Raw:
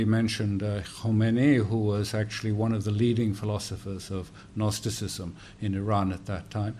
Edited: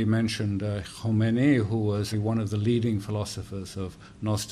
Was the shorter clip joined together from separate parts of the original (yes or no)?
yes